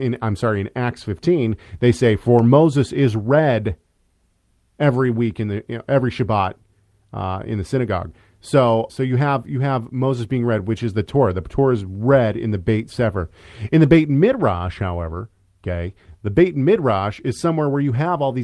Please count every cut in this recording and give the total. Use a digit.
1